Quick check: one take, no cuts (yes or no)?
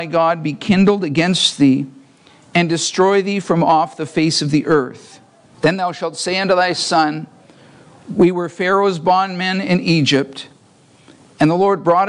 no